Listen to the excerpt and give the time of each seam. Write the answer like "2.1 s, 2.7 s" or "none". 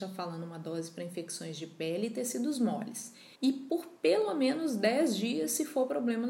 3.3 s